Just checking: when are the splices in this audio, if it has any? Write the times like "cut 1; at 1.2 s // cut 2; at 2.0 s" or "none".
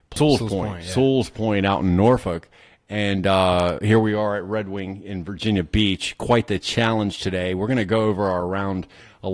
none

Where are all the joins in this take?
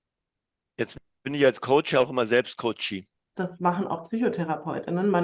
cut 1; at 3.3 s

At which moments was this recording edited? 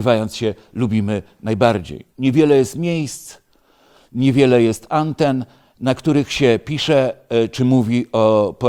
cut 1; at 2.1 s

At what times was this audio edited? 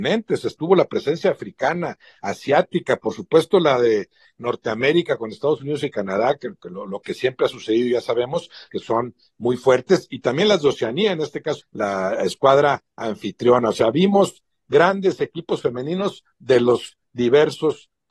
cut 1; at 8.7 s // cut 2; at 11.6 s

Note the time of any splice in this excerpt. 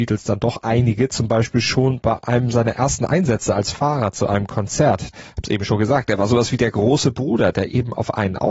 cut 1; at 5.1 s

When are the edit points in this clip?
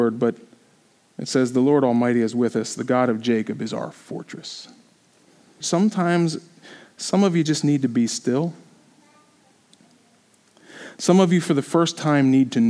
cut 1; at 5.6 s

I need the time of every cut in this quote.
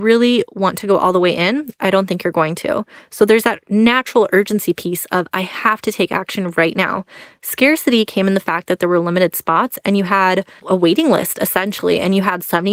cut 1; at 10.6 s

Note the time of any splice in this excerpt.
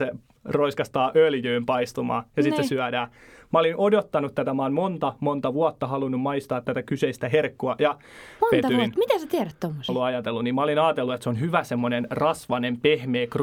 cut 1; at 9.9 s

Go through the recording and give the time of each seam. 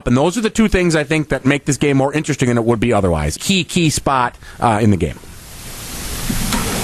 cut 1; at 3.4 s

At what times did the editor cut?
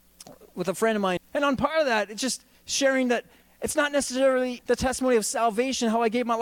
cut 1; at 1.2 s // cut 2; at 4.6 s

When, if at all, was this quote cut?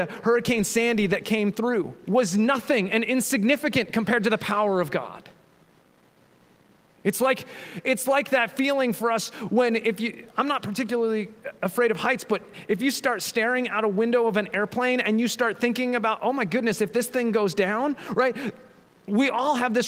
cut 1; at 2.0 s

